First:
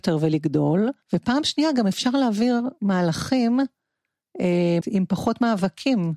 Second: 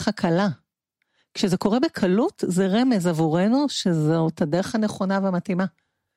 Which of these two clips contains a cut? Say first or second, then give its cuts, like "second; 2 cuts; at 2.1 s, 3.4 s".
first; 2 cuts; at 1.0 s, 4.8 s